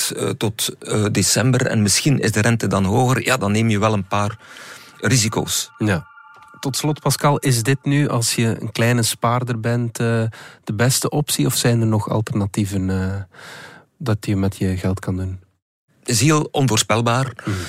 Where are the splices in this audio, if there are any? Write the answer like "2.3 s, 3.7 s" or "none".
15.9 s